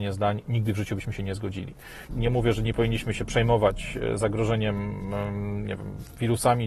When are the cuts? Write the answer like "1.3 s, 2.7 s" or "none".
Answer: 2.1 s